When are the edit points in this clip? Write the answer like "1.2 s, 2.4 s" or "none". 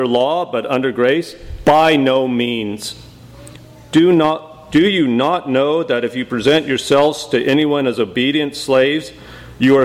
none